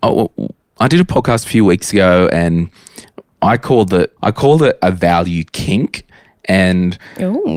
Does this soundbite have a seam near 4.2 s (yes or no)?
yes